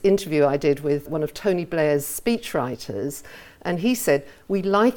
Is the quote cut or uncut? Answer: cut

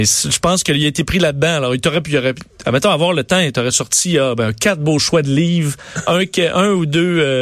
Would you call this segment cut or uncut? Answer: uncut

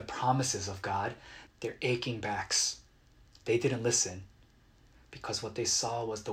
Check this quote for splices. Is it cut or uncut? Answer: cut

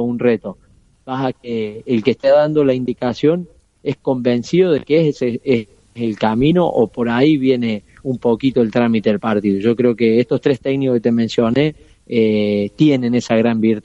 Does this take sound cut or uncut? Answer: cut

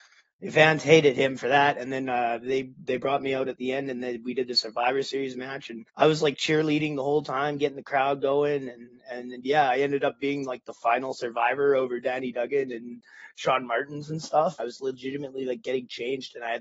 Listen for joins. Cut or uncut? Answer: cut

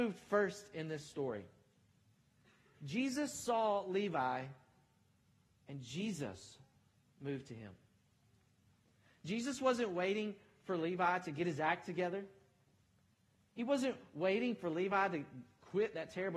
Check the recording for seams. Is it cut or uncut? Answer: uncut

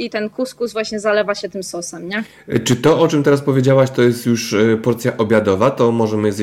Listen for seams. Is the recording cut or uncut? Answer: uncut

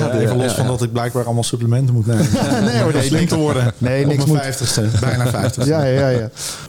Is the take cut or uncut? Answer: uncut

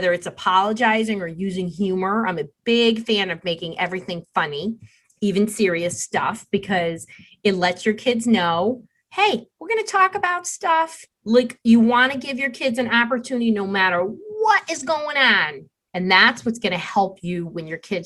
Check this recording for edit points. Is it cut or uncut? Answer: cut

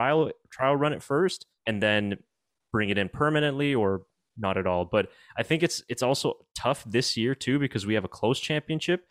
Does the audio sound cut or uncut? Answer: cut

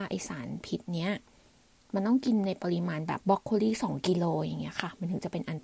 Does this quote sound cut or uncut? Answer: cut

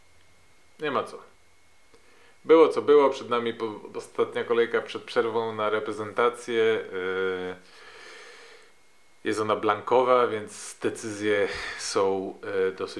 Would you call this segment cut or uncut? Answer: uncut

